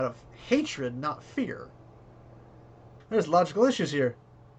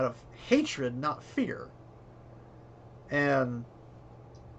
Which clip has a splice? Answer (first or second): first